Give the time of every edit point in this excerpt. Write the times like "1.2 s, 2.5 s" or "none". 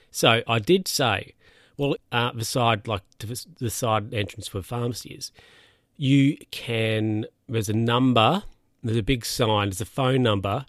2.0 s